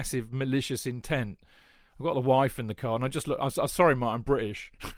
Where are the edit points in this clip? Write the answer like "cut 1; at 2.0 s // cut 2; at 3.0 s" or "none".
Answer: none